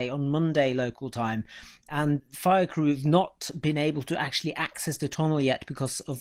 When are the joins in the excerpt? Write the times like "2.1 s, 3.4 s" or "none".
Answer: none